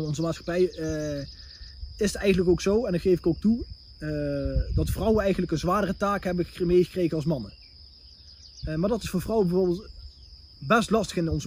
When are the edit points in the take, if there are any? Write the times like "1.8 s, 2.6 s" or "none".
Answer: 8.6 s